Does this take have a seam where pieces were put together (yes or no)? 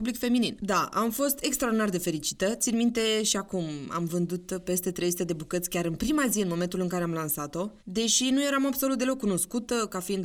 yes